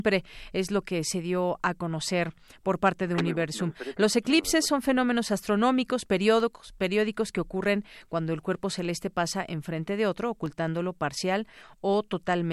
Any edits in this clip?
no; 0 cuts

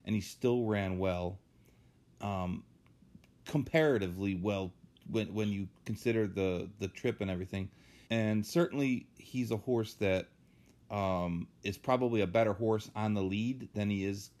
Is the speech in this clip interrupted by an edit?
yes; 2 cuts; at 5.8 s, 8.1 s

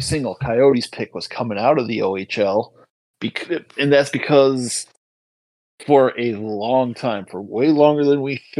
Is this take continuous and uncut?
yes; 0 cuts

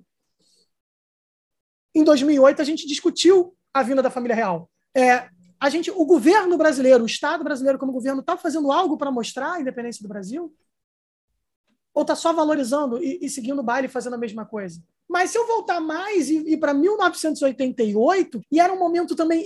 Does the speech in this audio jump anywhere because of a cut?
yes; 3 cuts; at 4.8 s, 15.0 s, 18.4 s

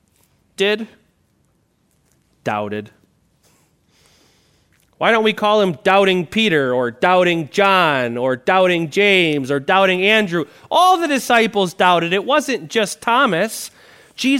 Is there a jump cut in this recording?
no; 0 cuts

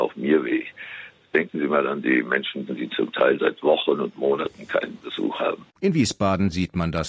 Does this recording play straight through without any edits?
no; 2 cuts; at 2.7 s, 5.8 s

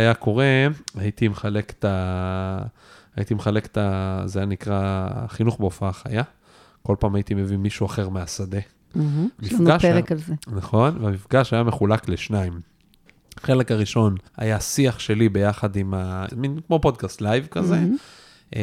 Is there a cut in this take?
yes; 3 cuts; at 9.4 s, 14.3 s, 16.3 s

